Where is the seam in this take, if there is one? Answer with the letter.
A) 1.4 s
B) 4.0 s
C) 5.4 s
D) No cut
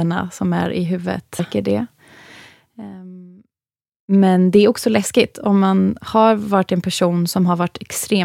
A